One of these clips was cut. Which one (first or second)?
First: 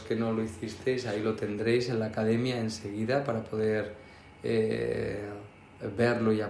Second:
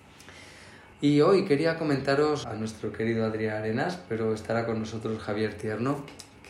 second